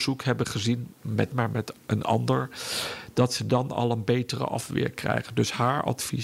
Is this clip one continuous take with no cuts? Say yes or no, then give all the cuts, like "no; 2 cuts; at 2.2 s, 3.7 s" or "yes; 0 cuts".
no; 1 cut; at 1.3 s